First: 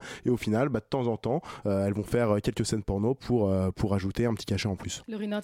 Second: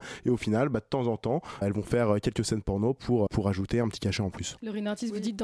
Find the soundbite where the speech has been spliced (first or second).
second